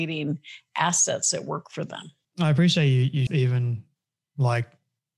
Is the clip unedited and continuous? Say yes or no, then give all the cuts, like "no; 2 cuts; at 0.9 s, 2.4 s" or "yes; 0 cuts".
no; 2 cuts; at 2.2 s, 3.3 s